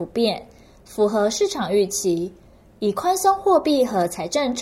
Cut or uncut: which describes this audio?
uncut